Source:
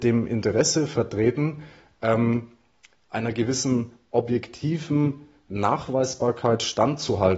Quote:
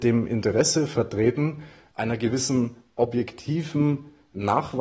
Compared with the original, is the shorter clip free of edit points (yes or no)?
no